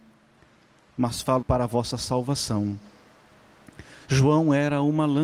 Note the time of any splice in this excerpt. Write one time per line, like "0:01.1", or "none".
0:01.4